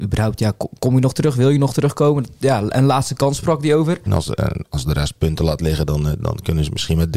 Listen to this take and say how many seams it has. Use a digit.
1